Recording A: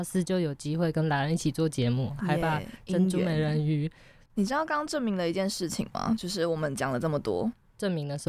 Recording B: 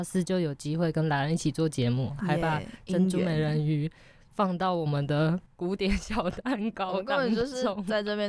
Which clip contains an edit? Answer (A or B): A